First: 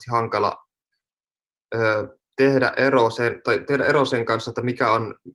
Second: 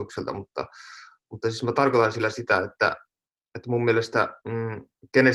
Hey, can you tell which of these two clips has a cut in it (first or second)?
second